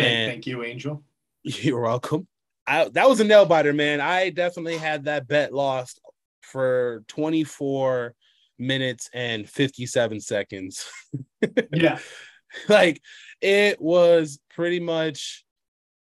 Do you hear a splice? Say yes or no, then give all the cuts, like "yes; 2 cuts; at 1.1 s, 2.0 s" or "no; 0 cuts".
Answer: no; 0 cuts